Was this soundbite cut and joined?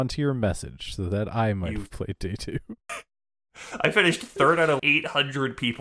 yes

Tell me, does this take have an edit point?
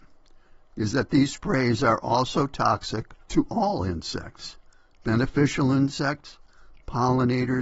yes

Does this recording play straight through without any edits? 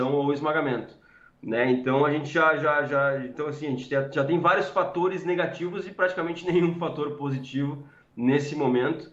yes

